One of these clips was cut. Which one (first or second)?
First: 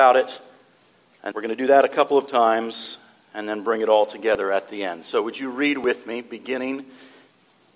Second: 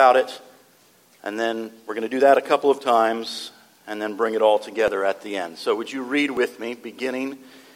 first